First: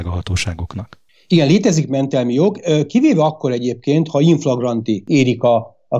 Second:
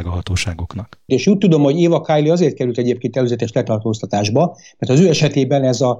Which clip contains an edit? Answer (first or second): second